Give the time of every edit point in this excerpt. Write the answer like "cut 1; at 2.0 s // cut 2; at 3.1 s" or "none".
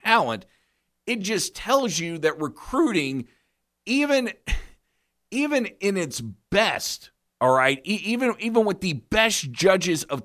none